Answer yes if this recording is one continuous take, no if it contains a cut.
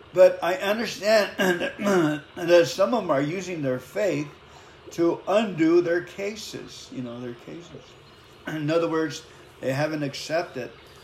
yes